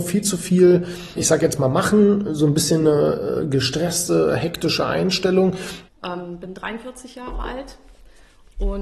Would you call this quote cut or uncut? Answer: cut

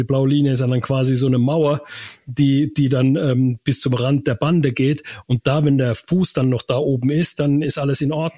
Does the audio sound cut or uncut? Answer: uncut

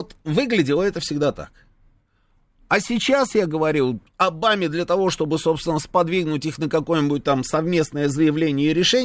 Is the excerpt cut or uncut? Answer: uncut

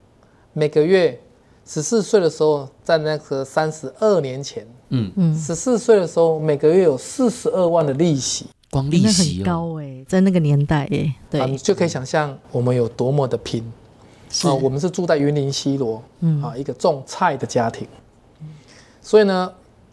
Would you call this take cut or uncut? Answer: uncut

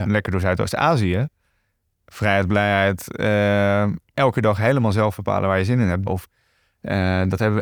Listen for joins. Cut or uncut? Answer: cut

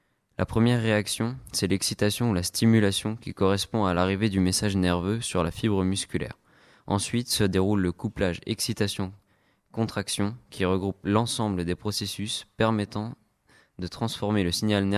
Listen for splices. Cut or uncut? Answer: uncut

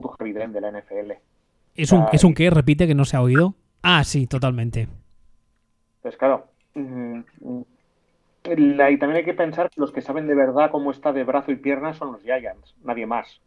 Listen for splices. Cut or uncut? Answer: cut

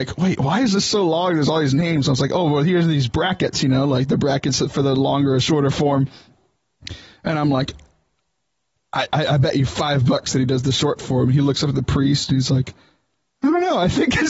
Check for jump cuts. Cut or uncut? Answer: uncut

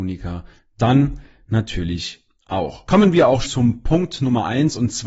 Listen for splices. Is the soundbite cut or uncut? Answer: cut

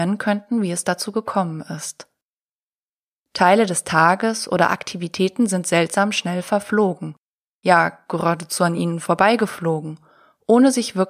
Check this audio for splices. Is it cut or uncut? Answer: uncut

